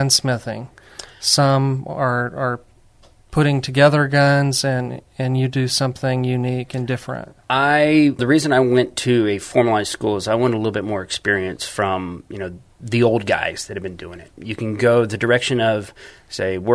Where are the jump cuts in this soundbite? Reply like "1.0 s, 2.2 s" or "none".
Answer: 8.2 s, 14.3 s

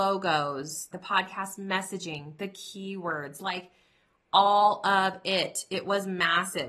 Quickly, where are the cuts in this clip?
0.9 s

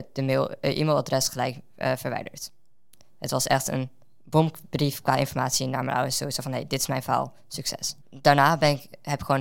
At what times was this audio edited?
8.0 s

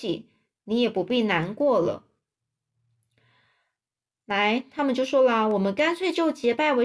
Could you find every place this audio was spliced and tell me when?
none

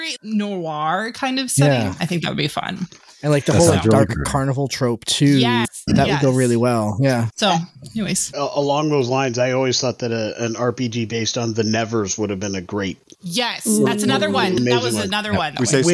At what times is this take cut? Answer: none

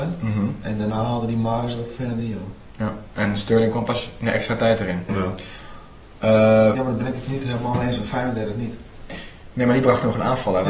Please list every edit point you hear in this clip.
5.1 s, 6.7 s

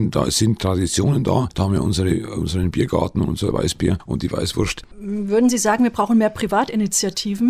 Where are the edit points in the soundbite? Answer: none

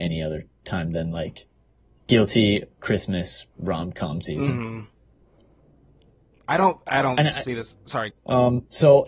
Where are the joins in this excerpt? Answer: 8.1 s

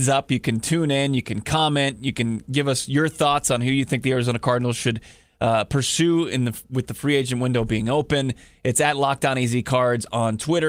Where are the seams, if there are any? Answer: none

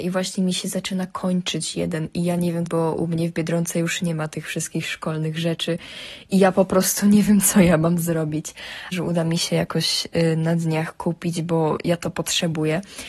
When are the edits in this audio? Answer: 2.7 s, 8.9 s

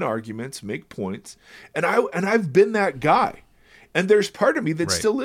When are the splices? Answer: none

